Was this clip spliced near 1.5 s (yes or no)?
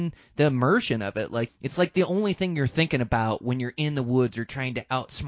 yes